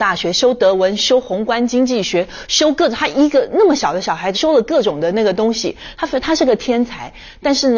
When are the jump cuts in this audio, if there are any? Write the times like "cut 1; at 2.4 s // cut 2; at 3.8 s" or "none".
cut 1; at 4.3 s